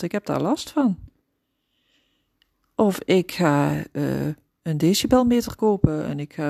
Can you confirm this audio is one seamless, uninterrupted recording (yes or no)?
yes